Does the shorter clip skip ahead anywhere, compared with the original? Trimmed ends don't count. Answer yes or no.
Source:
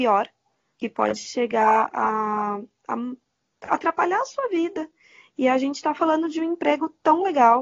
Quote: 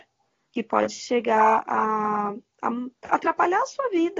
yes